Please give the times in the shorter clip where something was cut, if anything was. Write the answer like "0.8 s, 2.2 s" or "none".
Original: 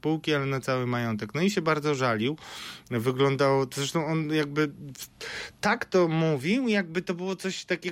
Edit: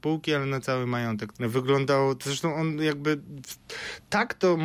1.3 s